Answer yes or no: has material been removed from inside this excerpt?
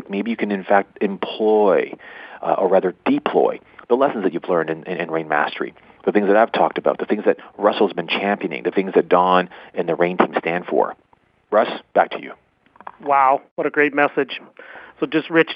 yes